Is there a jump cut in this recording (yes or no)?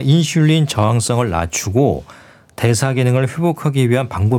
no